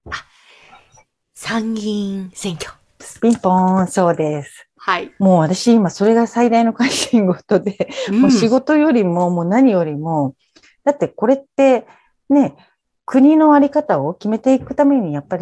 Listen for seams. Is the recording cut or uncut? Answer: uncut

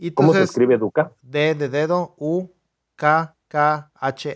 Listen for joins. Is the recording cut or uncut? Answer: uncut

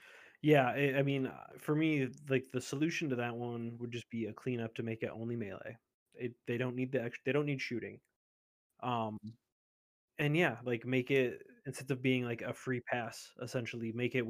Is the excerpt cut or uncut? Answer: uncut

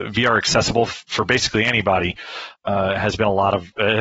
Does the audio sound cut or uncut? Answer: cut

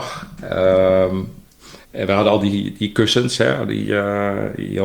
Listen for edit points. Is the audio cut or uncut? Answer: cut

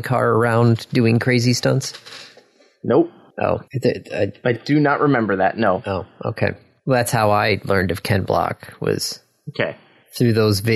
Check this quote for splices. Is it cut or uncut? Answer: cut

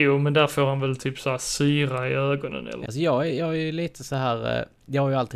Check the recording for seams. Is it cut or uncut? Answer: cut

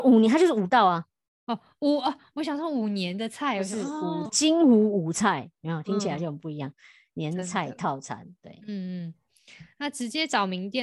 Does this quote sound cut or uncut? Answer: cut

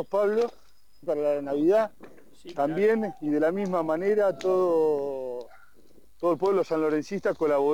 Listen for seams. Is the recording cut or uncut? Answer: cut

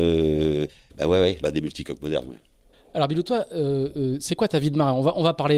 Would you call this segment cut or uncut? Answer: cut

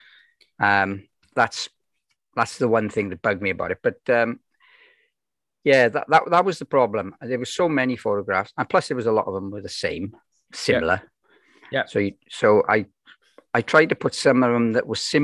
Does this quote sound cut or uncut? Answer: uncut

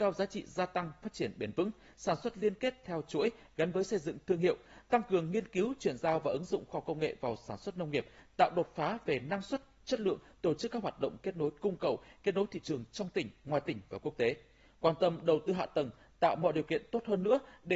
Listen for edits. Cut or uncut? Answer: uncut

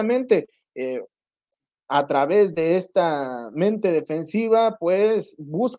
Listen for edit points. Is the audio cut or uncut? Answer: uncut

